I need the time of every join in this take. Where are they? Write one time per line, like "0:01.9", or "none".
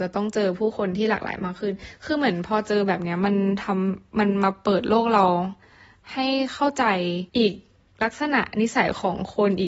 0:07.3